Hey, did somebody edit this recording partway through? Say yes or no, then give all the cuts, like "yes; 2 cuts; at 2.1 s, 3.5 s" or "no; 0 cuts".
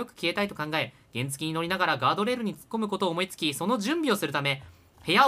no; 0 cuts